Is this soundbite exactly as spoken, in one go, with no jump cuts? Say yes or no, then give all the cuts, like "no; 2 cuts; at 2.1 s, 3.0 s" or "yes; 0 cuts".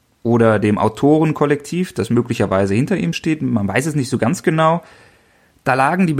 yes; 0 cuts